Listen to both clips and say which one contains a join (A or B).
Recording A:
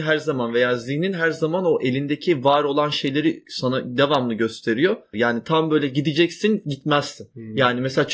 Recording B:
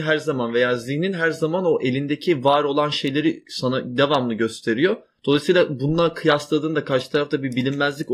A